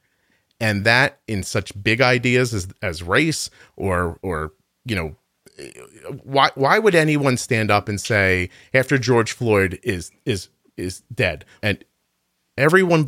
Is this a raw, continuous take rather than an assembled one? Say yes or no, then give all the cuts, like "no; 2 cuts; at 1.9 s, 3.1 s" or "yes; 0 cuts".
no; 2 cuts; at 4.2 s, 11.6 s